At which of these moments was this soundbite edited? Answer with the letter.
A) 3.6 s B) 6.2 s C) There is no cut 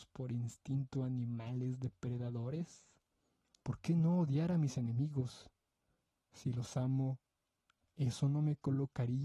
A